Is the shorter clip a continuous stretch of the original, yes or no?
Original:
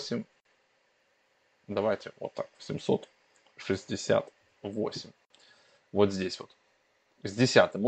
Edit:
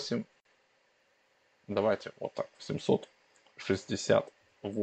yes